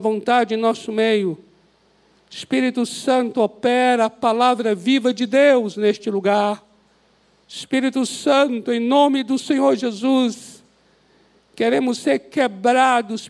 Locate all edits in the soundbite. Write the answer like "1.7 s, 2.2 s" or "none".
none